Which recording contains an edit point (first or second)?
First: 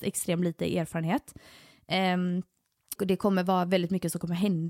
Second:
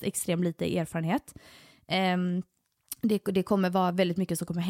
first